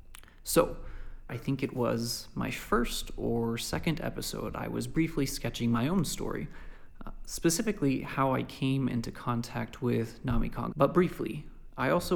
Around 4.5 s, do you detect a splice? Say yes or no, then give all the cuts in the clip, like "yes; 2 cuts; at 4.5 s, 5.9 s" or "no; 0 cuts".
no; 2 cuts; at 1.3 s, 10.7 s